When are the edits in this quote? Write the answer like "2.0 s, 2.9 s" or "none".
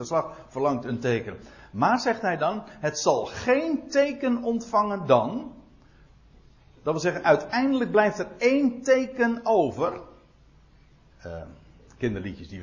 11.1 s